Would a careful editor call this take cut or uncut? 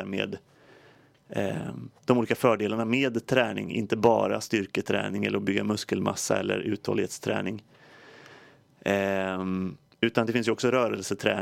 uncut